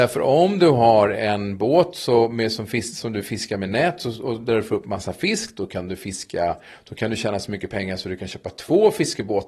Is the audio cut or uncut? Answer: uncut